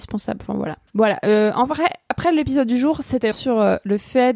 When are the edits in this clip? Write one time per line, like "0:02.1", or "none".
0:00.9
0:03.3